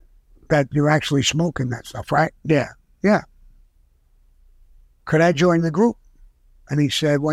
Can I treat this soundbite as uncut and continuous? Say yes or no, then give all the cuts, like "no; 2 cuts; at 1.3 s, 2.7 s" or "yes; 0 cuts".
yes; 0 cuts